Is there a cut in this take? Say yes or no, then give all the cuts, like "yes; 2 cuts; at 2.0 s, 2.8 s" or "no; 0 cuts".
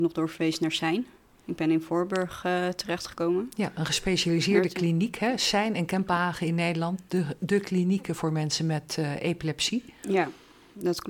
no; 0 cuts